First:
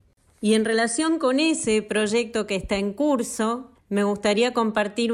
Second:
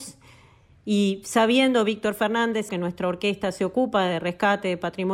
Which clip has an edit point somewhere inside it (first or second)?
second